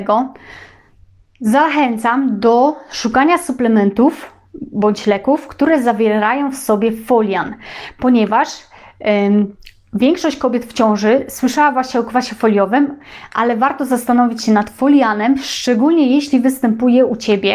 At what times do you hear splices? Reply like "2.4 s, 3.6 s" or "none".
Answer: none